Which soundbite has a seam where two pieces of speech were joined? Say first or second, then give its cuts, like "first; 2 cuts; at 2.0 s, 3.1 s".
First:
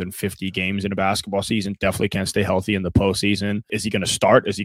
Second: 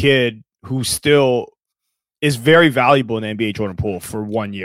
first; 1 cut; at 3.7 s